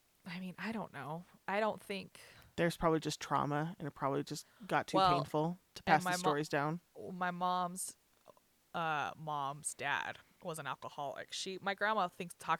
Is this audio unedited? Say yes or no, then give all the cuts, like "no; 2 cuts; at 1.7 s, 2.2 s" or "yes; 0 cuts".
yes; 0 cuts